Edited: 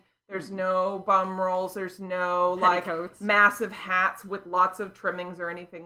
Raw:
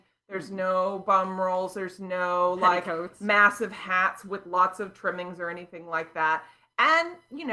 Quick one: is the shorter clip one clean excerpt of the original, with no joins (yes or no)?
yes